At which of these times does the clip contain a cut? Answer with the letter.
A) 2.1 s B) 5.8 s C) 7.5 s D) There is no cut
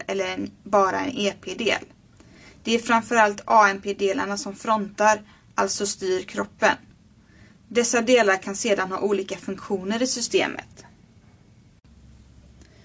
D